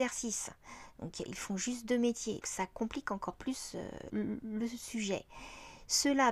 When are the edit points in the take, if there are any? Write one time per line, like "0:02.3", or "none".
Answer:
0:02.4
0:04.1